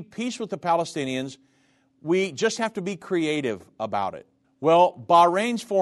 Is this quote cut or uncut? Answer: cut